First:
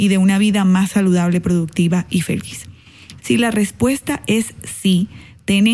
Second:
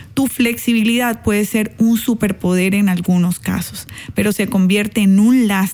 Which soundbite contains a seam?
first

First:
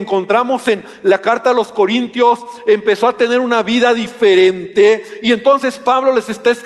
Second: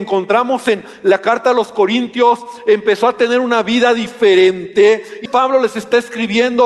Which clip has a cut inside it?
second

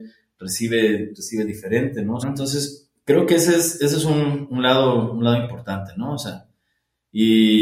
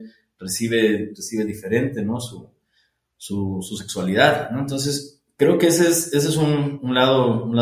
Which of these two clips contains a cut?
first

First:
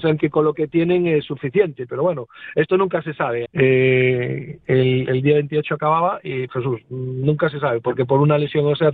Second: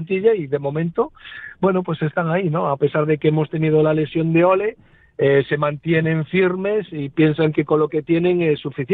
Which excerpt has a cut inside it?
first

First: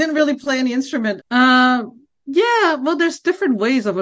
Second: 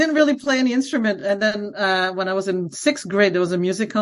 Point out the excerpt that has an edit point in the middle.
first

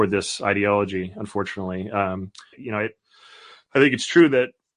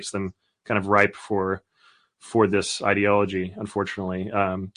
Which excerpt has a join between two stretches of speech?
first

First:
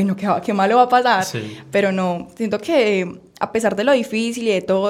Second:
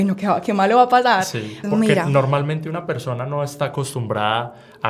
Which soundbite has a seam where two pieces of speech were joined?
second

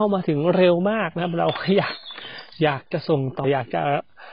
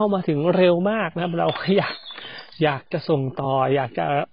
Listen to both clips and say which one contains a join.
first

